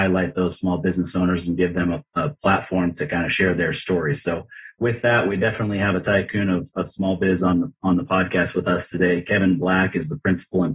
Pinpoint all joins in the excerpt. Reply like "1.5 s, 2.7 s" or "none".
none